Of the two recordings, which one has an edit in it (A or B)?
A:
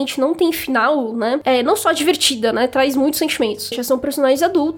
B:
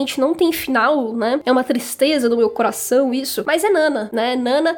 A